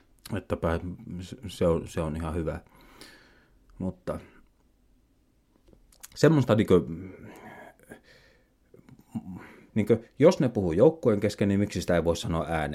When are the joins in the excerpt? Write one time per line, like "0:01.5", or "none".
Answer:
0:09.7